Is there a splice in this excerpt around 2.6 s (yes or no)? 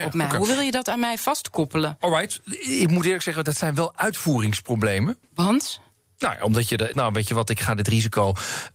no